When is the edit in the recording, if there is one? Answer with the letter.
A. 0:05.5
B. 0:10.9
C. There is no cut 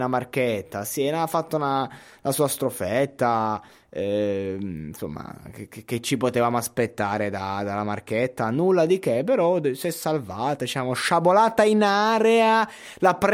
C